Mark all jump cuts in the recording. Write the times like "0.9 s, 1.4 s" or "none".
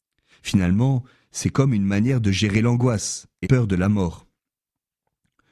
3.4 s